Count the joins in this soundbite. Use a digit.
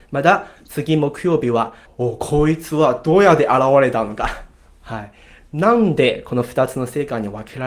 1